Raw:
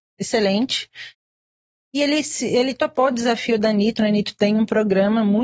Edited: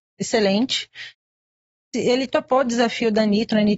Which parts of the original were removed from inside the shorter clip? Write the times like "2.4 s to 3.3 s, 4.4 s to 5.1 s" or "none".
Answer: 1.9 s to 2.4 s